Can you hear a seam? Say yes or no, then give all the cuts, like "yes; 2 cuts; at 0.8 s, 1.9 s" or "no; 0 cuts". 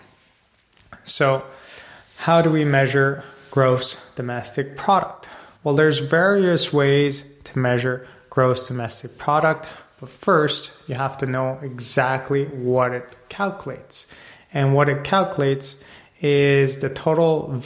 no; 0 cuts